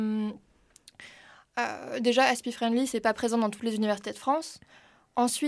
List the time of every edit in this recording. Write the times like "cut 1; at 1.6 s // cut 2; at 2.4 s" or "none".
none